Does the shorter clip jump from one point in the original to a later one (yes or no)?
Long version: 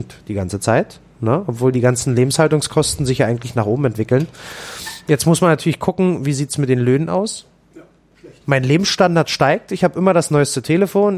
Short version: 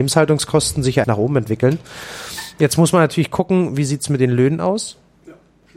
yes